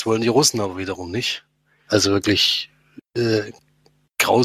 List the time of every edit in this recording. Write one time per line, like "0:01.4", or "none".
0:01.9